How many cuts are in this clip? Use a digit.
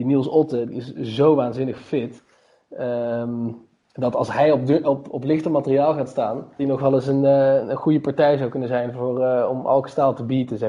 1